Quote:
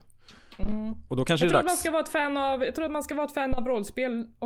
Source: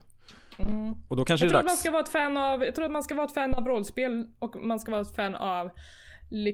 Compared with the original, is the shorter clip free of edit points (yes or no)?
yes